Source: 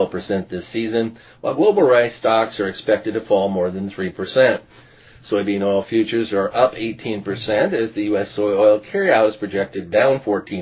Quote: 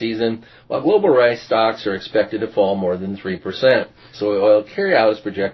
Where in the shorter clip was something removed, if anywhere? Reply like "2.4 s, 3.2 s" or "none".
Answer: 4.1 s

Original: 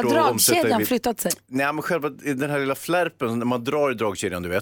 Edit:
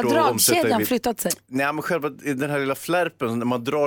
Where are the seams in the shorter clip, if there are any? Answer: none

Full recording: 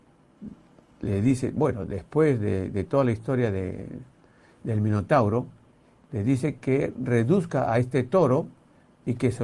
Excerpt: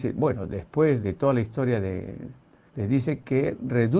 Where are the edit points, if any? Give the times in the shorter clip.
1.0 s, 2.7 s

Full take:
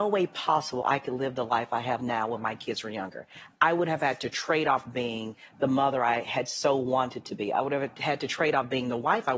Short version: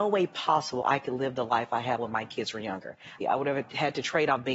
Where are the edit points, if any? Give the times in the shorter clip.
2.0 s, 3.2 s

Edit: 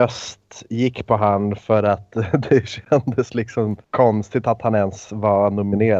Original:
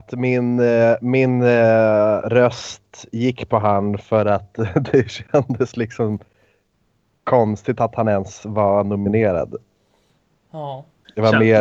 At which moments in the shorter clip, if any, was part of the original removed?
3.8 s

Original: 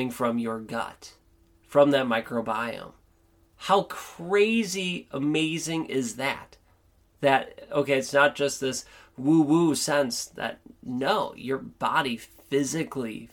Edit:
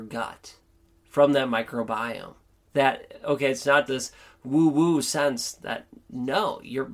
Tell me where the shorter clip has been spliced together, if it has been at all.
2.5 s, 3.9 s

